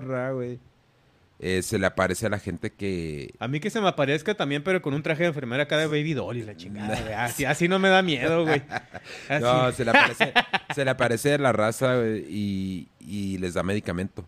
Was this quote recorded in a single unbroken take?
yes; 0 cuts

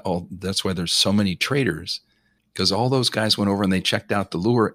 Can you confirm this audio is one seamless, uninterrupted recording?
no; 1 cut; at 2.4 s

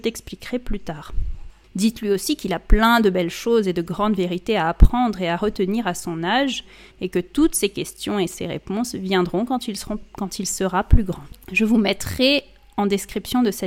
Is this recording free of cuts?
yes; 0 cuts

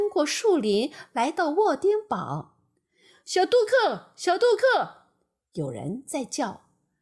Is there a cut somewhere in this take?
no; 0 cuts

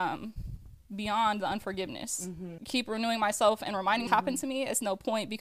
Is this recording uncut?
no; 2 cuts; at 2.6 s, 4.1 s

